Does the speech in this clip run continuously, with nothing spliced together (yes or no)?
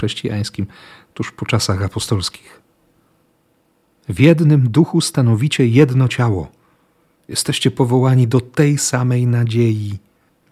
yes